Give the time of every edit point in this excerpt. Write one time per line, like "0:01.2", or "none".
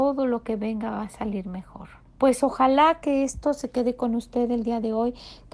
0:02.1